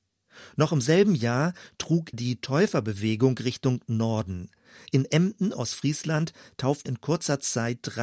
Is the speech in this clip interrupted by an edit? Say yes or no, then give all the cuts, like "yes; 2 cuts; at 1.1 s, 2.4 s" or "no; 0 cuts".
yes; 2 cuts; at 2.1 s, 6.9 s